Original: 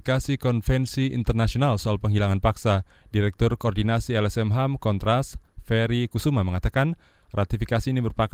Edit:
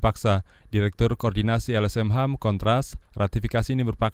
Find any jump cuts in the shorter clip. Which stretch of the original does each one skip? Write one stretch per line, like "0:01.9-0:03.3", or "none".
0:05.4-0:07.2